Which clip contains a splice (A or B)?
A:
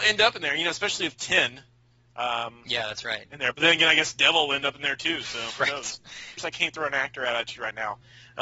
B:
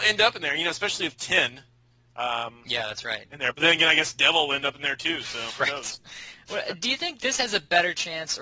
A